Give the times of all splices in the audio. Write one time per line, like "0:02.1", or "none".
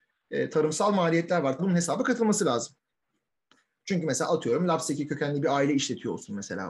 0:01.6